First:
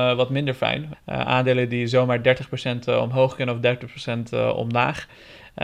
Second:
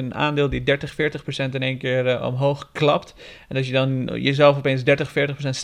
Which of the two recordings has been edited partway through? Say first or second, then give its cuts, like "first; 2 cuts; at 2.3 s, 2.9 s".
first; 1 cut; at 0.9 s